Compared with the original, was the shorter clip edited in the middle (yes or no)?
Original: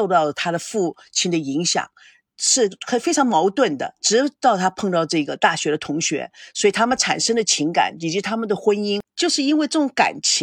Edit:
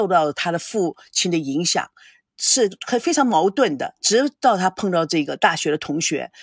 no